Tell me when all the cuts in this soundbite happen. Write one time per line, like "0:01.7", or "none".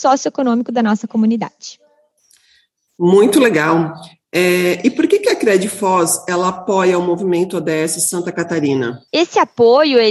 0:09.1

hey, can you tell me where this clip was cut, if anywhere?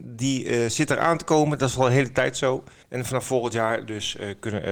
0:02.8

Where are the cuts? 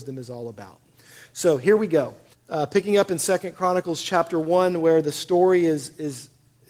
0:02.3

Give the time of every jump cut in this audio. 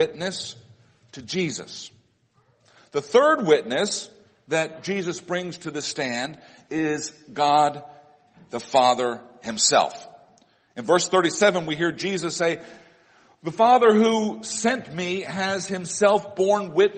none

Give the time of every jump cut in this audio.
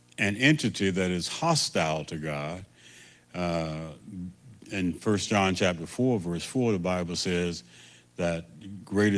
none

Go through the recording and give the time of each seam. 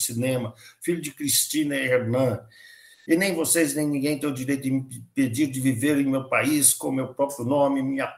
none

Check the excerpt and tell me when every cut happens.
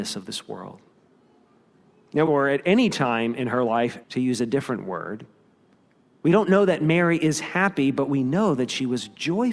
0:02.3
0:04.0

